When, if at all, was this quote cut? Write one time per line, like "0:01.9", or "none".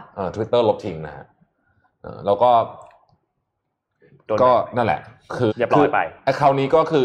0:05.5